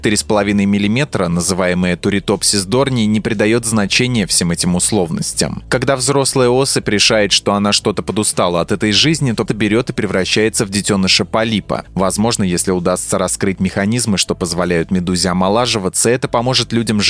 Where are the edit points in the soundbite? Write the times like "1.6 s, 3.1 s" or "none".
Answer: 9.5 s, 11.9 s